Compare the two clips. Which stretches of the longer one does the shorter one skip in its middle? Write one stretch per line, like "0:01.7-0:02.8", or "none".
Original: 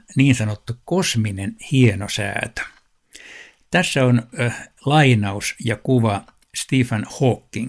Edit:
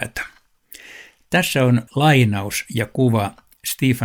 0:04.3-0:04.8